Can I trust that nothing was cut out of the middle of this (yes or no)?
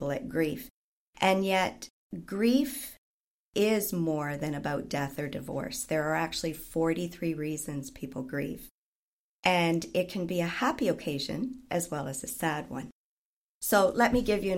yes